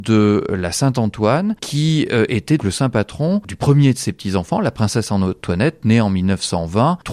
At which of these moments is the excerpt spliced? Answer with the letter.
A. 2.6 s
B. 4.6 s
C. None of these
A